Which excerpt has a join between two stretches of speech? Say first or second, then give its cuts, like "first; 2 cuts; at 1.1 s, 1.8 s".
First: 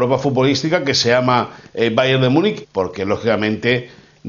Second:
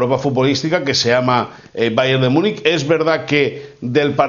first; 1 cut; at 2.6 s